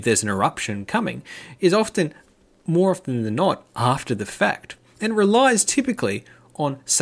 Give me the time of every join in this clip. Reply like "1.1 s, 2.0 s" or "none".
none